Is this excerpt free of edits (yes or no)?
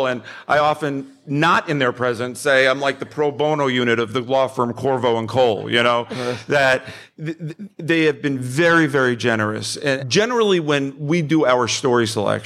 no